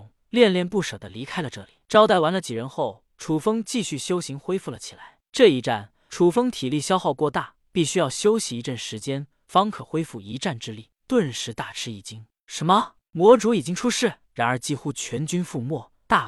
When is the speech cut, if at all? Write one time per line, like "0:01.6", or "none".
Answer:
0:11.0
0:14.2